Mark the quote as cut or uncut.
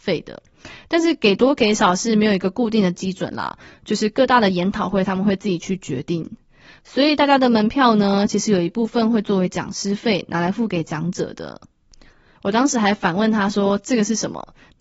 cut